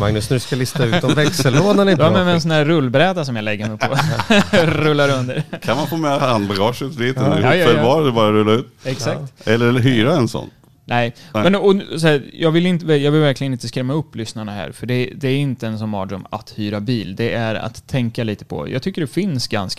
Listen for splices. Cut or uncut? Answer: uncut